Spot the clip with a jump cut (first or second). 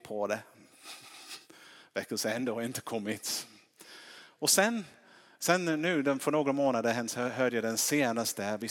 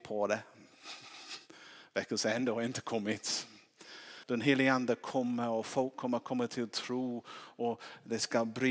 second